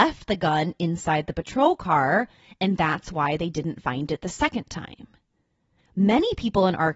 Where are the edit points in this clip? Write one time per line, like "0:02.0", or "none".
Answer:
0:05.8